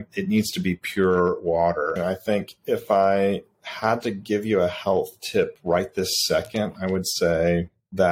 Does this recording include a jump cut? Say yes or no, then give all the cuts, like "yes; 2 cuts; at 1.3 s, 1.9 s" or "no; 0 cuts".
yes; 1 cut; at 2.0 s